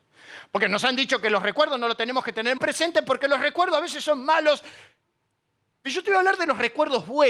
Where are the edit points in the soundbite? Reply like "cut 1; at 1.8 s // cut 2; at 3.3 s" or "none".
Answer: cut 1; at 2.6 s